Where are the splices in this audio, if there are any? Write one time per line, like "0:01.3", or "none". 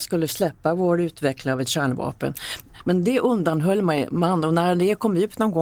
none